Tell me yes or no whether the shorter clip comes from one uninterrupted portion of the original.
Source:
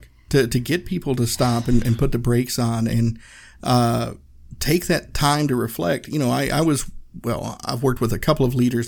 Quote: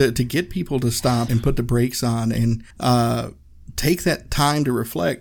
no